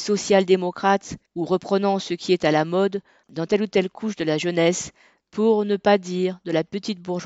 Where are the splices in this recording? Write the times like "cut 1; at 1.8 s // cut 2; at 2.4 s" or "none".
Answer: cut 1; at 1.3 s // cut 2; at 5.2 s